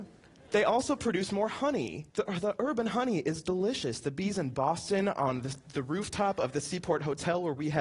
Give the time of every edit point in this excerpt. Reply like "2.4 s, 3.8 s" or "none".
2.1 s